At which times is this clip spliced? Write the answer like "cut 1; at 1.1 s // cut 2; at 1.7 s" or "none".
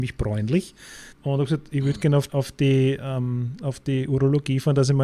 cut 1; at 1.1 s // cut 2; at 2.3 s